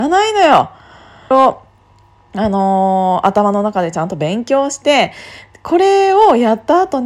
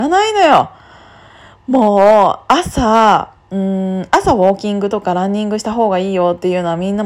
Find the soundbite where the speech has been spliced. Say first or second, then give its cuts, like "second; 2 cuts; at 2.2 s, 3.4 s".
first; 1 cut; at 1.3 s